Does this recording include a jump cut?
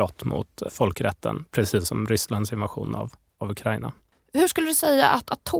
no; 0 cuts

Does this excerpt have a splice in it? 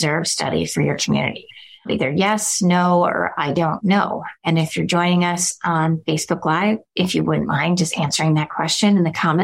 no; 0 cuts

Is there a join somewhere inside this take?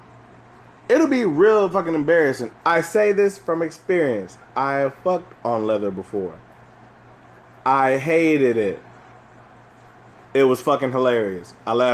yes; 2 cuts; at 2.5 s, 10.2 s

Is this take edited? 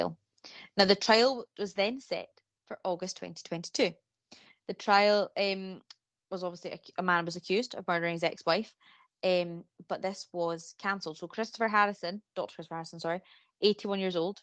no; 0 cuts

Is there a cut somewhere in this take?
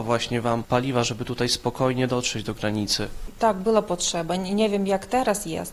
no; 0 cuts

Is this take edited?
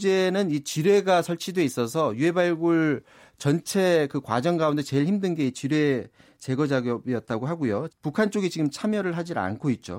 yes; 1 cut; at 7.9 s

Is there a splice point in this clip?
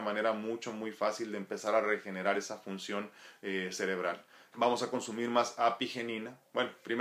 yes; 1 cut; at 4.5 s

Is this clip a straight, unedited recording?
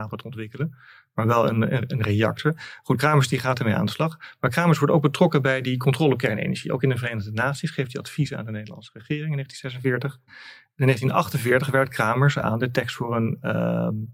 yes; 0 cuts

